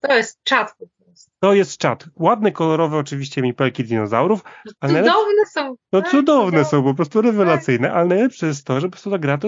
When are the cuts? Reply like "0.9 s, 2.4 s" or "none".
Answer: none